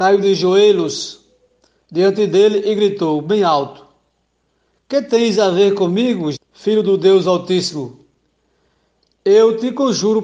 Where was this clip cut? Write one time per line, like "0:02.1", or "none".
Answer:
0:06.3